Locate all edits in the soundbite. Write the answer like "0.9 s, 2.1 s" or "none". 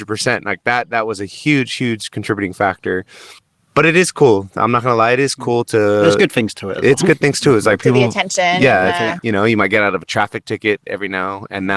none